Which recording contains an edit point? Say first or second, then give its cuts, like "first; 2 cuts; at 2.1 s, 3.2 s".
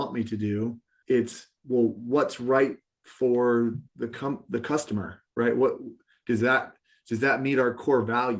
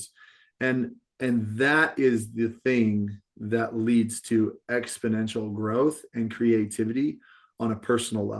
first; 2 cuts; at 1.0 s, 3.9 s